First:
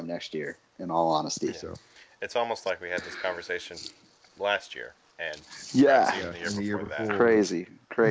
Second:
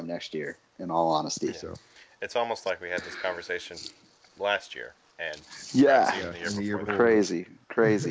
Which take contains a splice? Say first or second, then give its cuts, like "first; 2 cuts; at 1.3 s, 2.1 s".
second; 1 cut; at 6.9 s